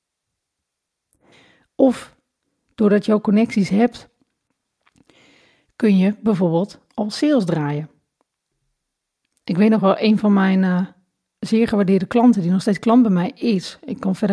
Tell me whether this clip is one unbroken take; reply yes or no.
yes